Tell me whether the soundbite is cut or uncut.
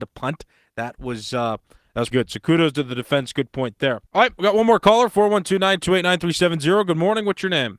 cut